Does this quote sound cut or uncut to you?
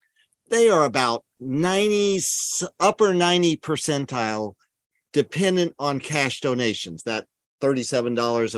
uncut